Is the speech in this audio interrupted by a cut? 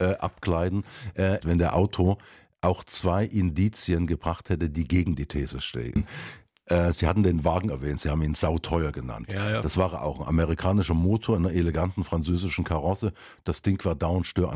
yes; 1 cut; at 1.4 s

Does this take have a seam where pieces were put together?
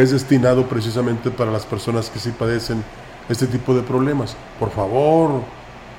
no; 0 cuts

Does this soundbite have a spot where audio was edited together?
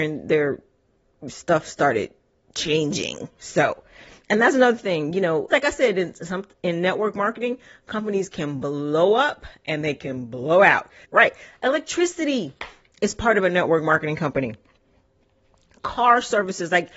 yes; 2 cuts; at 5.5 s, 11.0 s

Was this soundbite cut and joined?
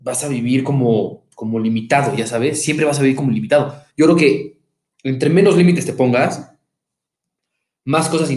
yes; 1 cut; at 3.9 s

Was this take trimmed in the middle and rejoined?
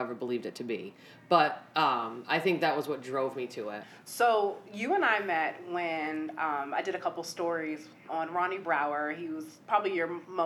yes; 1 cut; at 8.1 s

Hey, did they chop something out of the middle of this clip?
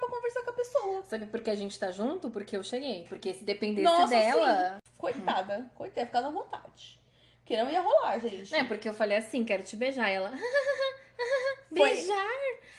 no; 0 cuts

